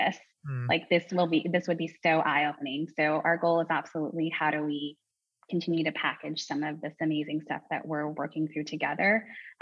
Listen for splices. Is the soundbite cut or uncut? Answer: uncut